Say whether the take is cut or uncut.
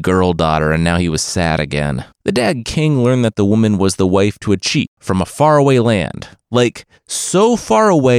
cut